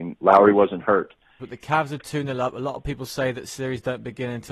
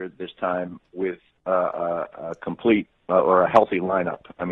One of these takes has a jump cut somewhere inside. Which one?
first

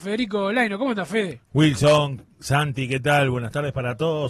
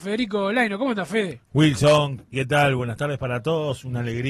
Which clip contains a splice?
second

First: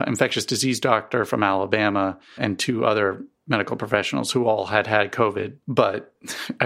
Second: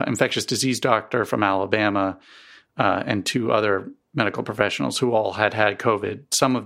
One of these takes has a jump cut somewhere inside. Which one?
first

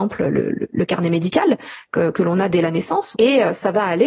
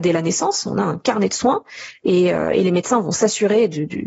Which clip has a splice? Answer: first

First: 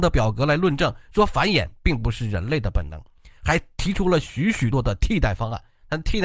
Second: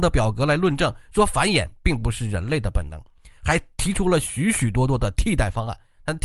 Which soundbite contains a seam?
first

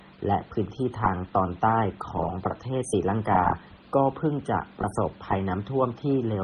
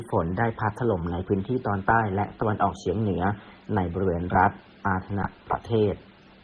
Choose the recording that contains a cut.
first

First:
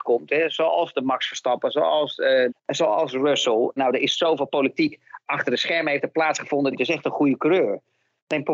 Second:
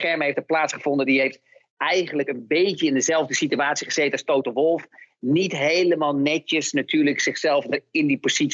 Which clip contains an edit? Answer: first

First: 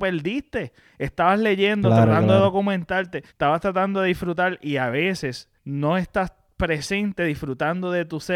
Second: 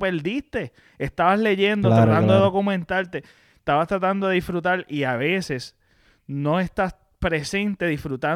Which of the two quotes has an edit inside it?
first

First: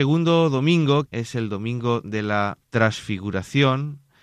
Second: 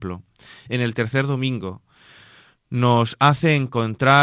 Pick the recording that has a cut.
first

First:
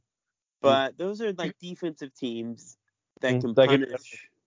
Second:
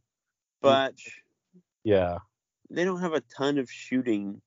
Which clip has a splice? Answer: second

